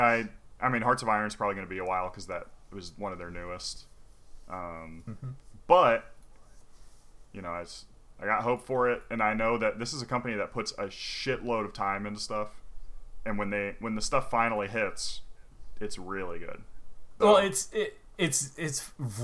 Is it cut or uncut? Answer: cut